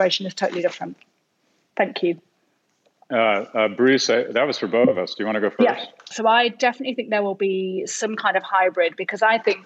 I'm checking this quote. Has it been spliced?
yes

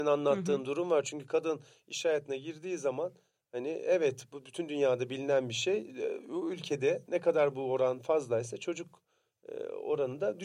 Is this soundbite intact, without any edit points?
yes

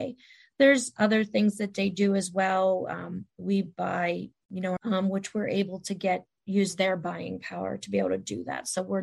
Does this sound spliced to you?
yes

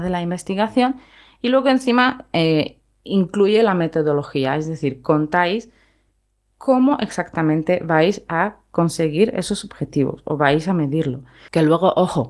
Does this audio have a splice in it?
no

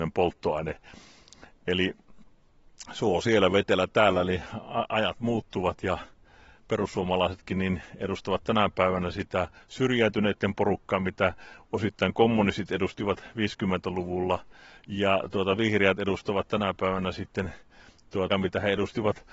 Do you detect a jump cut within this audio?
yes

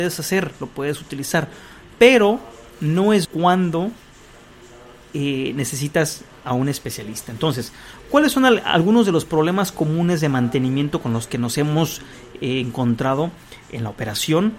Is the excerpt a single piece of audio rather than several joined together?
no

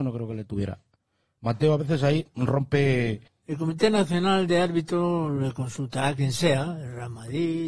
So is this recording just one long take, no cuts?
no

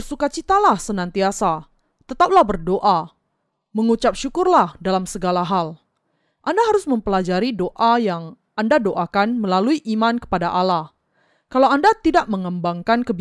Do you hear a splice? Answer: no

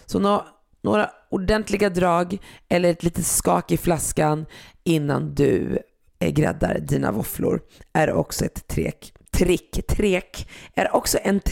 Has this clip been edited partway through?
no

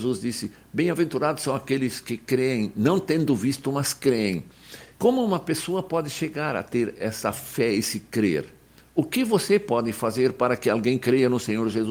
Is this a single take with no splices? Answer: no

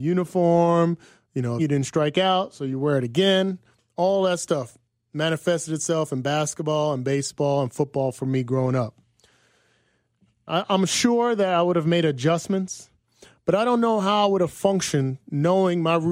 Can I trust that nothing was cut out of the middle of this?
no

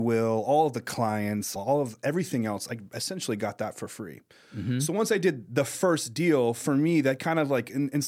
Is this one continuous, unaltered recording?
no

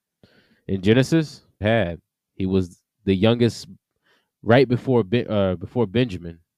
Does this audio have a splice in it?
yes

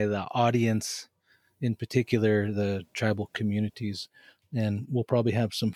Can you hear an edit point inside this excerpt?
no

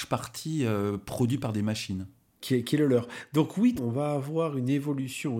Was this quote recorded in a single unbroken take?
no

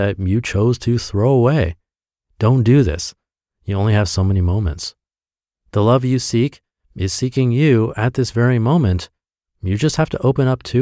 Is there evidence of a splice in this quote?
no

